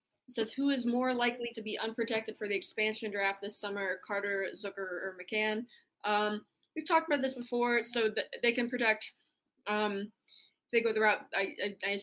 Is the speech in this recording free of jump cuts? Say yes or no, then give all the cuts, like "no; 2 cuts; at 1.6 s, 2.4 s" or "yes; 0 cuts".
yes; 0 cuts